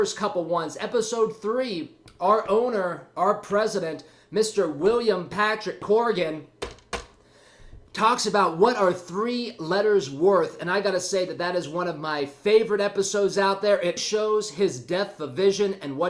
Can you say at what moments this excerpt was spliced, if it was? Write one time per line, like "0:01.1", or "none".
0:14.0